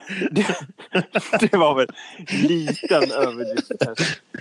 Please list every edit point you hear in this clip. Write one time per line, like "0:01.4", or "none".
none

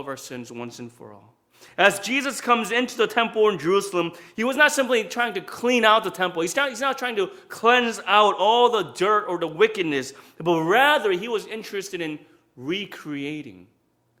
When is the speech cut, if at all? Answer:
none

